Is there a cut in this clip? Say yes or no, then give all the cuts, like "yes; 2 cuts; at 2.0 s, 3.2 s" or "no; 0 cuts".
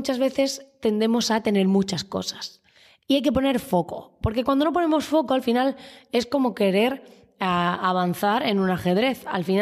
no; 0 cuts